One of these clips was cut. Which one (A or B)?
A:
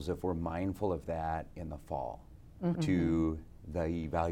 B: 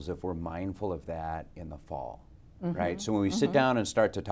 A